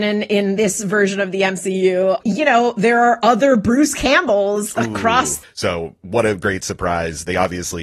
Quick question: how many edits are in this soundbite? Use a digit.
2